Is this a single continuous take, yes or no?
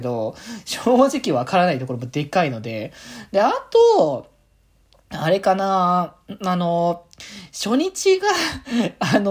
yes